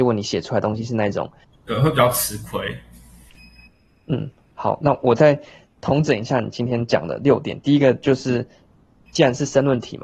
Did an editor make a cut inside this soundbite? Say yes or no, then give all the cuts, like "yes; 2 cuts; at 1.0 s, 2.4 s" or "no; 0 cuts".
yes; 1 cut; at 1.4 s